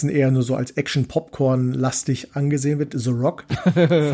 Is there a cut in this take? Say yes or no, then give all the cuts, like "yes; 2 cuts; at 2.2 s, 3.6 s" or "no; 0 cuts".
no; 0 cuts